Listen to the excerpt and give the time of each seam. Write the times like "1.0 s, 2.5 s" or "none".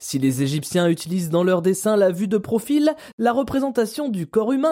3.1 s